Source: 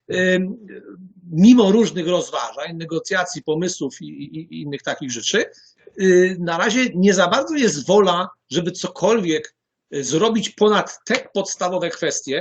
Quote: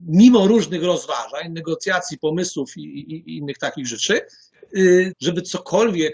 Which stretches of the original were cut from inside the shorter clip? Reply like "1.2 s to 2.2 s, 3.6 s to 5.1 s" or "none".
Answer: 6.4 s to 8.4 s